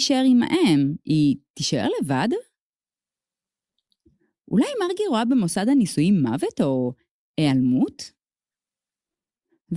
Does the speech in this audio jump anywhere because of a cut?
no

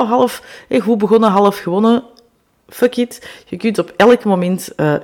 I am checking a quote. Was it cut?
no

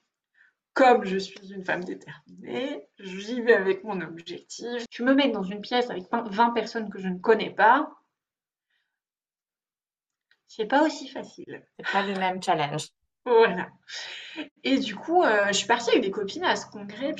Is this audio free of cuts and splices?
no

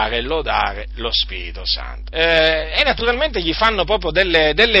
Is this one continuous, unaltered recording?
no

